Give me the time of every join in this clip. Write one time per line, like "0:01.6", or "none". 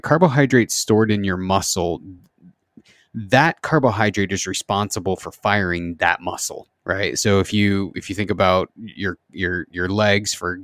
none